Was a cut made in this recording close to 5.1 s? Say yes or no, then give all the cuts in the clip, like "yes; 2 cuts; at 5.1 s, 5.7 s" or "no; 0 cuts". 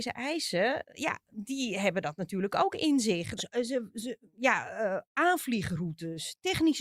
no; 1 cut; at 3.4 s